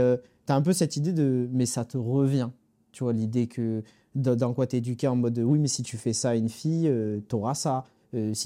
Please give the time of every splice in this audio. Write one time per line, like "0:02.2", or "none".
none